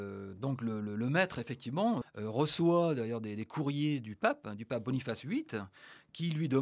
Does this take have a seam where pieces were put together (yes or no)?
yes